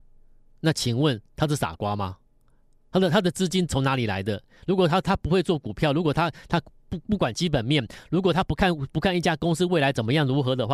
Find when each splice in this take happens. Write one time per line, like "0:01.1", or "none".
none